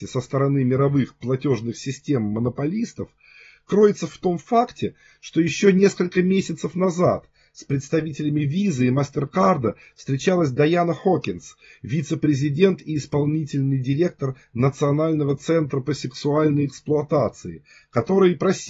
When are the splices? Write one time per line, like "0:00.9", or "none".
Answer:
0:04.1